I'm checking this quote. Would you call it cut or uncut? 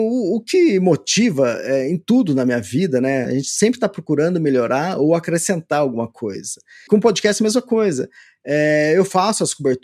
cut